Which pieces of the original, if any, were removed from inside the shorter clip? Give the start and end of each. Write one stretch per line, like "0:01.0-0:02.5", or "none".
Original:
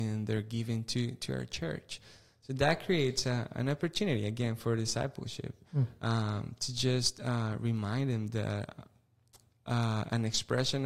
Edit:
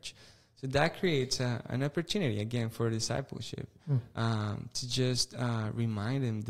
none